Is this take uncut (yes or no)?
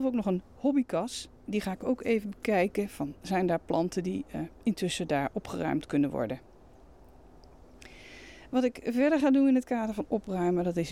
no